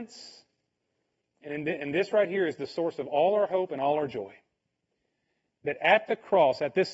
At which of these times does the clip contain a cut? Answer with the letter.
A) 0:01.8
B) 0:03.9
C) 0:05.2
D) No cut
A